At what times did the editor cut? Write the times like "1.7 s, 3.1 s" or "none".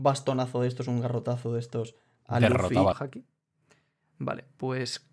2.9 s